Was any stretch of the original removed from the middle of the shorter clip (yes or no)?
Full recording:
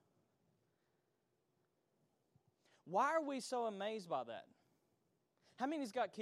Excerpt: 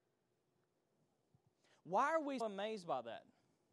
yes